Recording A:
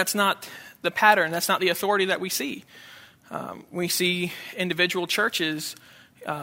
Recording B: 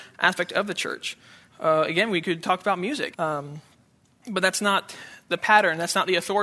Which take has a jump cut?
B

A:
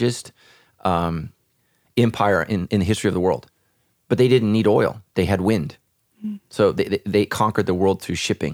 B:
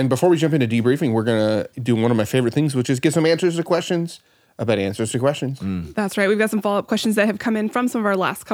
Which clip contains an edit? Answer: A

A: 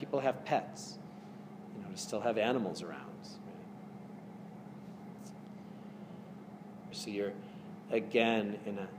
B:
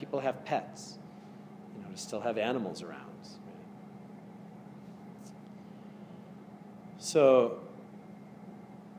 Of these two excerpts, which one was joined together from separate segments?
A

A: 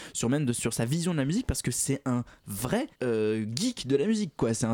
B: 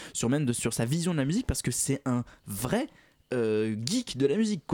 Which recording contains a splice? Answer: A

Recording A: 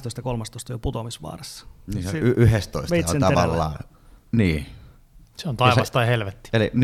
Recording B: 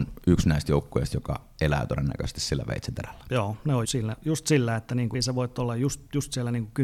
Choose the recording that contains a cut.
B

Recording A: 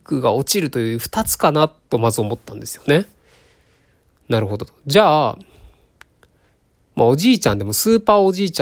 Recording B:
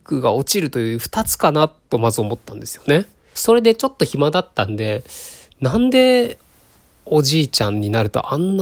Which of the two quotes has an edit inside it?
B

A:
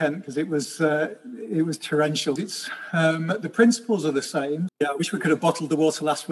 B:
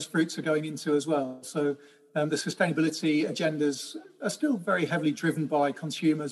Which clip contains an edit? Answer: A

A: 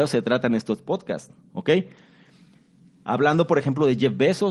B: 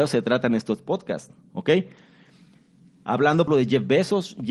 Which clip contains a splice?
B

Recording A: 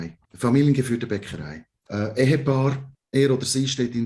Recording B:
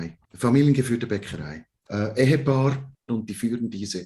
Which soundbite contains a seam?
B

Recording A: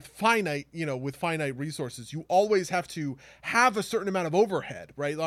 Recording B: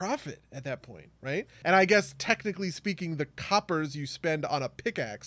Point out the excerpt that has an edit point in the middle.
B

